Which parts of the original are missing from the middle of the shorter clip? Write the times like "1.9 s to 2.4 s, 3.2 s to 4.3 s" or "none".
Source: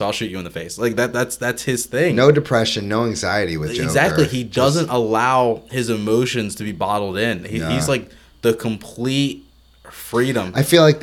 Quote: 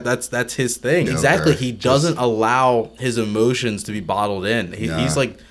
2.1 s to 3.8 s